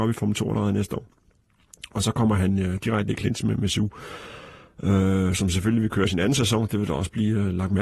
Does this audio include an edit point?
no; 0 cuts

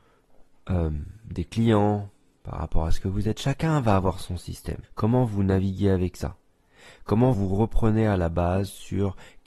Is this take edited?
yes; 2 cuts; at 4.8 s, 7.3 s

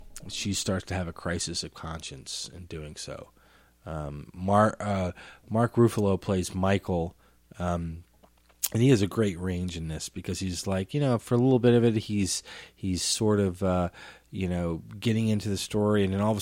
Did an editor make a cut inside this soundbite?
no; 0 cuts

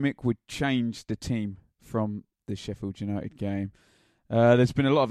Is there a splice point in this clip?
no; 0 cuts

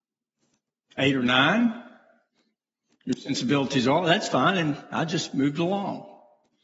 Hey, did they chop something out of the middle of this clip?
no; 0 cuts

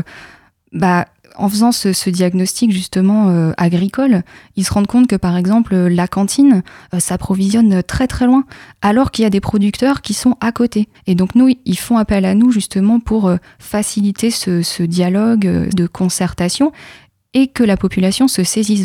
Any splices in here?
yes; 2 cuts; at 10.9 s, 15.7 s

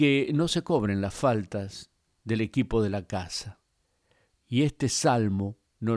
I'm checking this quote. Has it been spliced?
yes; 1 cut; at 4.3 s

